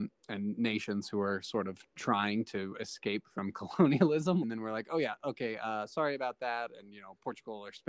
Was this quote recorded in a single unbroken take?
no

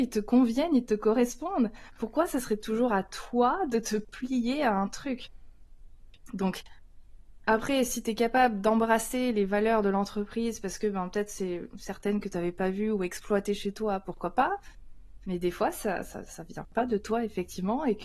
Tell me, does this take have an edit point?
no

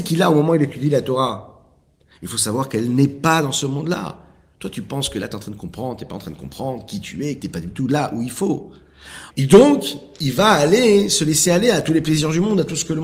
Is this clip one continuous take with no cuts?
no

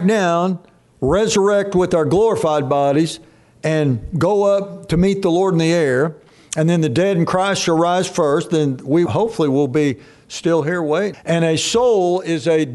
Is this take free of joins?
no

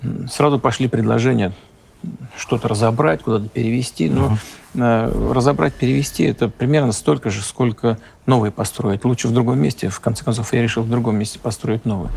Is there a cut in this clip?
no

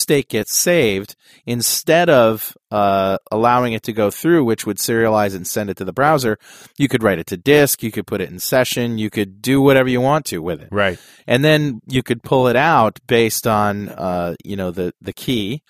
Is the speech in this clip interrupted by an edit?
no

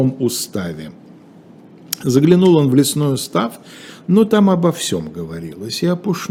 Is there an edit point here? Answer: no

